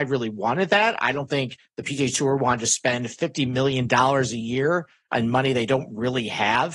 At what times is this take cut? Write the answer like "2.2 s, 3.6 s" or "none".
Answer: none